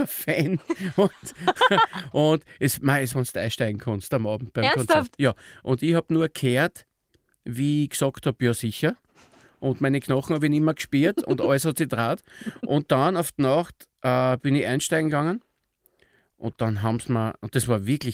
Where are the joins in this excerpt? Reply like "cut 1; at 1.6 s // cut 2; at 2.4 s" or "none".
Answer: cut 1; at 3.1 s

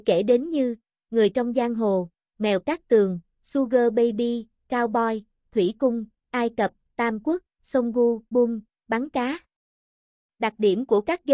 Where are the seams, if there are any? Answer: cut 1; at 8.3 s

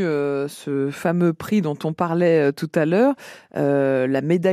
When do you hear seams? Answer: none

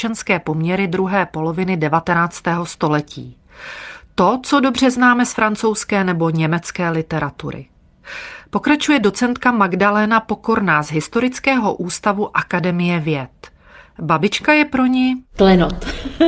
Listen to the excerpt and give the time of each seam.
none

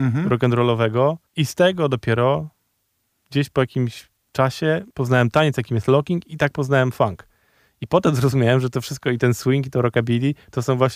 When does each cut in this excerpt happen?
cut 1; at 4.9 s

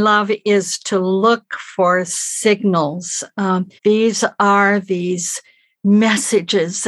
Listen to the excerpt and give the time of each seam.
cut 1; at 3.8 s

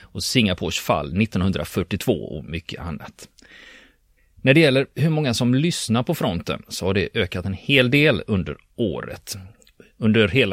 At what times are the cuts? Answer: cut 1; at 4.2 s

